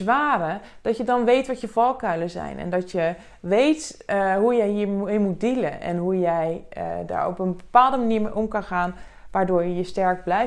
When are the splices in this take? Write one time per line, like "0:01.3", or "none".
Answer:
none